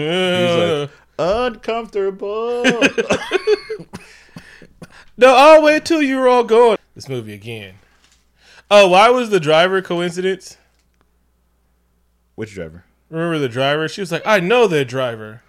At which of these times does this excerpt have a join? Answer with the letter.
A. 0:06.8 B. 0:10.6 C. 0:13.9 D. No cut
A